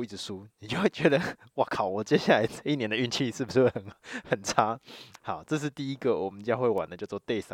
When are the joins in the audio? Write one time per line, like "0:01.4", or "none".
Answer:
0:05.2